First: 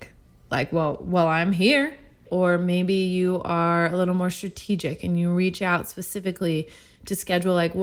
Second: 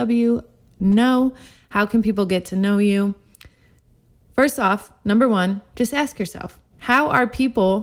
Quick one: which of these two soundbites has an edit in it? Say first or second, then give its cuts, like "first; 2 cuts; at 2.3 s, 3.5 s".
first; 1 cut; at 2.2 s